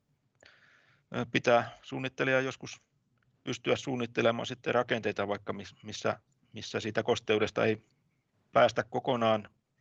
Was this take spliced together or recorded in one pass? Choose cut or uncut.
uncut